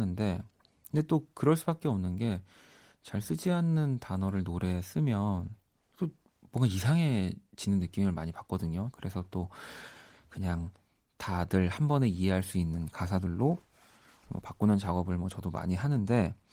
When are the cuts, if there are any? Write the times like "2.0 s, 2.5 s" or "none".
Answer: 8.9 s